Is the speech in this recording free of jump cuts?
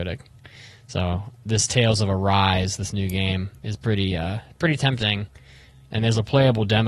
yes; 0 cuts

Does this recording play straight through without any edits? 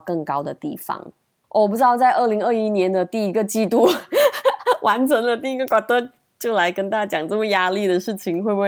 yes; 0 cuts

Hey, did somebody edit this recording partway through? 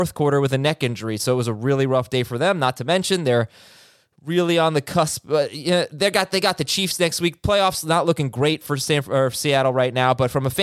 no; 0 cuts

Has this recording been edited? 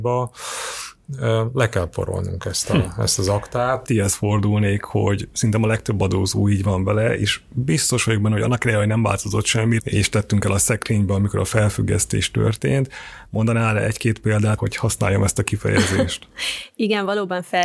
yes; 3 cuts; at 3.8 s, 9.8 s, 14.6 s

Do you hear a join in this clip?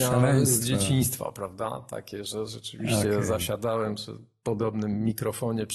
no; 0 cuts

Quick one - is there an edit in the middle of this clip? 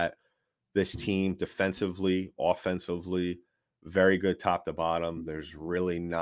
no; 0 cuts

